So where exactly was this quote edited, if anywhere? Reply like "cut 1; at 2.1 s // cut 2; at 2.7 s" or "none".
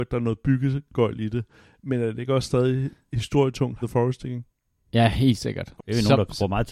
cut 1; at 3.8 s // cut 2; at 5.8 s